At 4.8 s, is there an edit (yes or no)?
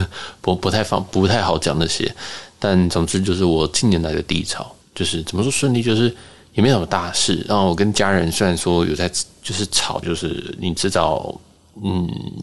yes